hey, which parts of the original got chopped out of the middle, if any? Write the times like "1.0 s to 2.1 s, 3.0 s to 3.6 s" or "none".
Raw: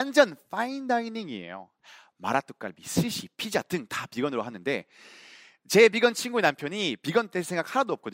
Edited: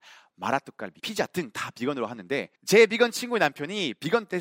2.8 s to 3.4 s, 4.9 s to 5.6 s